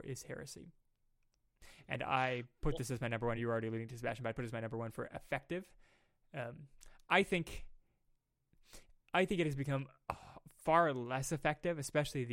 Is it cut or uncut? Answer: uncut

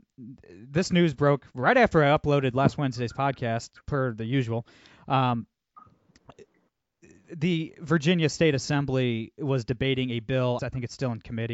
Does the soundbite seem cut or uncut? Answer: cut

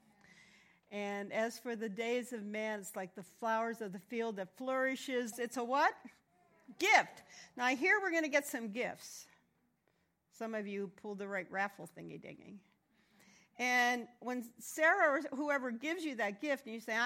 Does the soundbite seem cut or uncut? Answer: cut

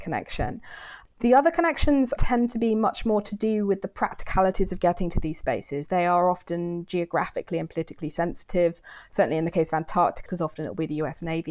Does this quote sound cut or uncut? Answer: cut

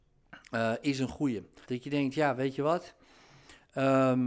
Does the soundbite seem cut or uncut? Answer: cut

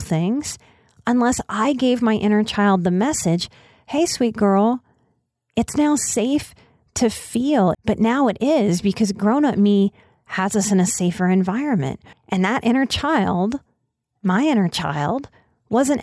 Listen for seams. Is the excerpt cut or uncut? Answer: cut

